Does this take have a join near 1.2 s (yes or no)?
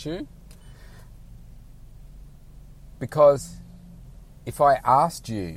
no